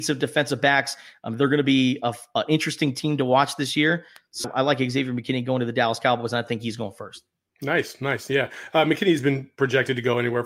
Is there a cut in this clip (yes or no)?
yes